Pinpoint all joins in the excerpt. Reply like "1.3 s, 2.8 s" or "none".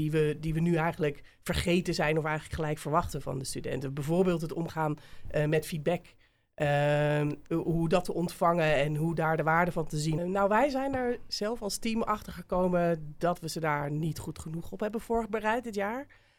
10.2 s